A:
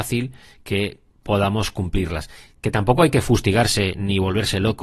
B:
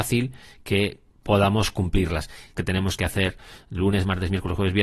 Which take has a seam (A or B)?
B